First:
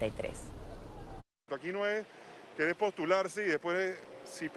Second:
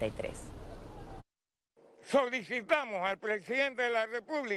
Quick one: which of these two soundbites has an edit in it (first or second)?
first